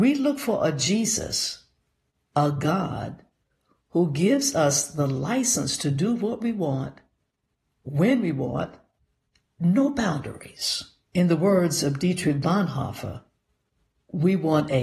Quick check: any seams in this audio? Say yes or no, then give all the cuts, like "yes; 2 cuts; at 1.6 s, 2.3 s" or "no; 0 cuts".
yes; 2 cuts; at 9.5 s, 11.0 s